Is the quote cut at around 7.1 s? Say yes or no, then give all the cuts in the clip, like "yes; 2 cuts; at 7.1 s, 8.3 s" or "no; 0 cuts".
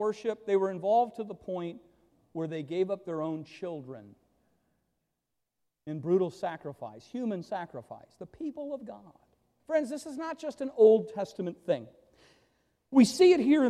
no; 1 cut; at 9.6 s